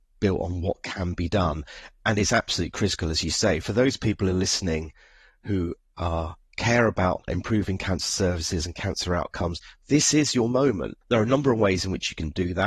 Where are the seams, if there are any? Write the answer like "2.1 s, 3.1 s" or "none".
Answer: 7.3 s, 11.0 s